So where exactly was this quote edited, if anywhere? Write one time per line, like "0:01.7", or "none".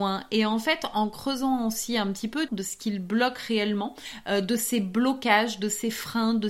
0:02.5